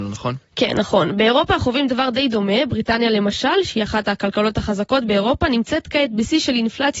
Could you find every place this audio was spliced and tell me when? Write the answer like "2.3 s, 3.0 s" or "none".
none